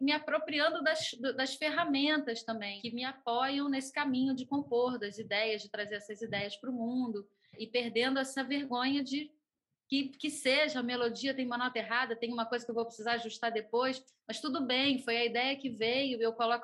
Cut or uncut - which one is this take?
uncut